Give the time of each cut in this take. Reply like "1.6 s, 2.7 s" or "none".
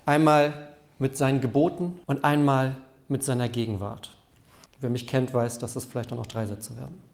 2.0 s, 4.7 s